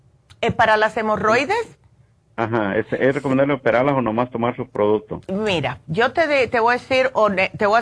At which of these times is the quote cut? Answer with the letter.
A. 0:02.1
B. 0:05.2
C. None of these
B